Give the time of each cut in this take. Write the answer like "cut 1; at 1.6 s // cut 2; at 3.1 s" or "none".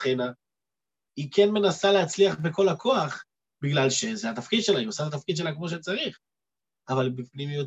cut 1; at 1.1 s